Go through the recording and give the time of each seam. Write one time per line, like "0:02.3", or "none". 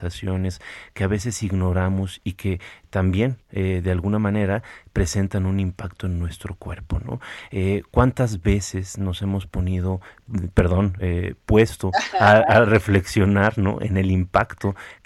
none